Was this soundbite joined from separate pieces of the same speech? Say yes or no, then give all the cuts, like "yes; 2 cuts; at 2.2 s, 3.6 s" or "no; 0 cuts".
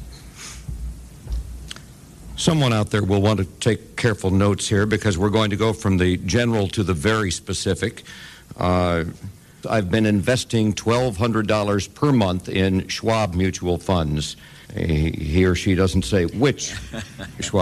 yes; 2 cuts; at 9.6 s, 14.6 s